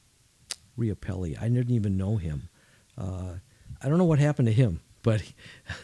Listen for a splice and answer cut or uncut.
uncut